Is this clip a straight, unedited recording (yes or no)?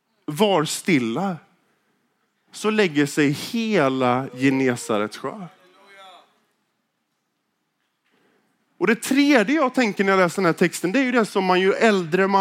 yes